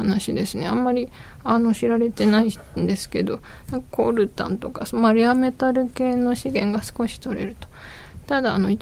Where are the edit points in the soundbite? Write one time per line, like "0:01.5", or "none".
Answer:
none